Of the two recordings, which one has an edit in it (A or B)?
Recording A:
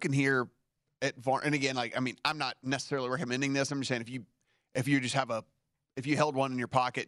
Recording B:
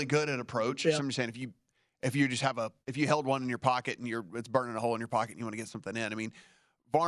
B